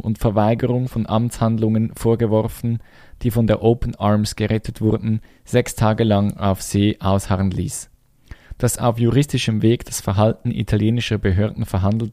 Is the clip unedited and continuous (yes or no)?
no